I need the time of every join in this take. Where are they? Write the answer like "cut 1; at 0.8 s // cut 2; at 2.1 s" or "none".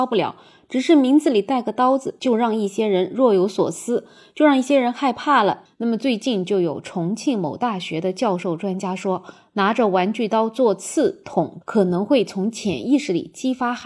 cut 1; at 5.7 s // cut 2; at 11.6 s